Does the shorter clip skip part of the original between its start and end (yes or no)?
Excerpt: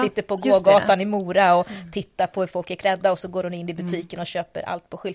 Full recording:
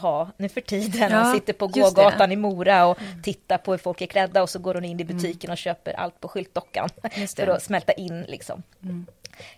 no